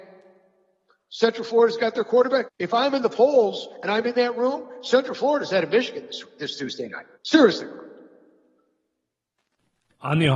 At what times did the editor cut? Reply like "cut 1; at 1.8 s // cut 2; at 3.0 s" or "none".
cut 1; at 2.4 s // cut 2; at 7.1 s